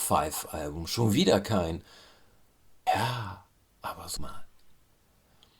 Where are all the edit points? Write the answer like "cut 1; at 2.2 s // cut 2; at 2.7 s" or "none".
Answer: cut 1; at 2.9 s // cut 2; at 4.2 s

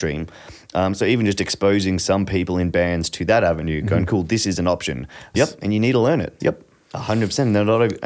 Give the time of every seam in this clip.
cut 1; at 5.3 s // cut 2; at 6.4 s

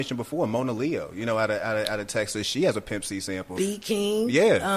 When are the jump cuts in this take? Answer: cut 1; at 3.6 s

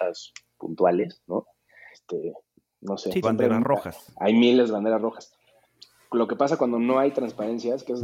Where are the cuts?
cut 1; at 1.9 s // cut 2; at 3.2 s

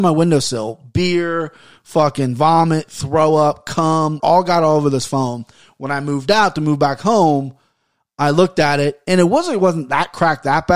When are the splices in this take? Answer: cut 1; at 4.2 s

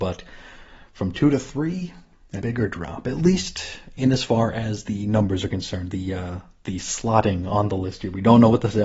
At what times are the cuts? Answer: cut 1; at 2.4 s

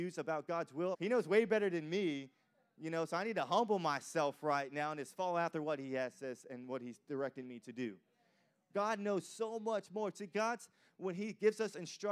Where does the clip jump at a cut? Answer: cut 1; at 0.9 s

